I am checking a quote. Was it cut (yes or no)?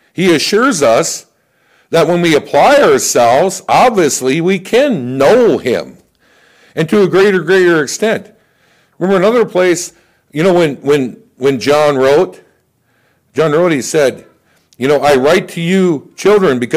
no